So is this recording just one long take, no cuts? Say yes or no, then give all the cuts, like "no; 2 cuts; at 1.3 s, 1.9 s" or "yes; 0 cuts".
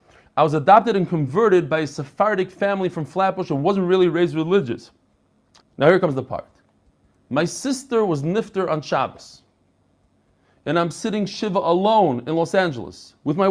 no; 1 cut; at 5.6 s